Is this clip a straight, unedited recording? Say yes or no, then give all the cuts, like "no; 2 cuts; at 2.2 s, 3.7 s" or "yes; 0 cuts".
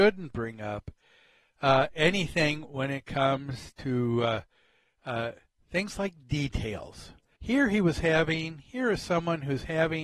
no; 1 cut; at 7.4 s